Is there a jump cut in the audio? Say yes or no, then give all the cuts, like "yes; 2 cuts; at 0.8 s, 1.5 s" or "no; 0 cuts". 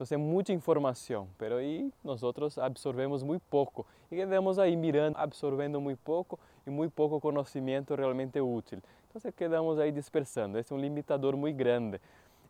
yes; 1 cut; at 5.1 s